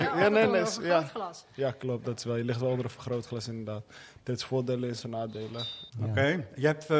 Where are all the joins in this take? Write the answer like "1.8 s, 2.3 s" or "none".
4.2 s, 5.9 s